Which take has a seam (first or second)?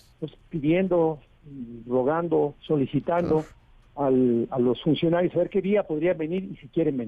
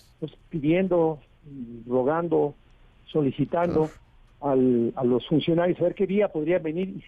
first